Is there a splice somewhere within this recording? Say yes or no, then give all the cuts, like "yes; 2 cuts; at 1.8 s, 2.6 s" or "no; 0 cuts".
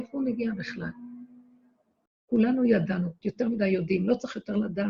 yes; 2 cuts; at 2.1 s, 3.2 s